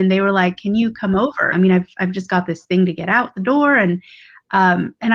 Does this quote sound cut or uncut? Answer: cut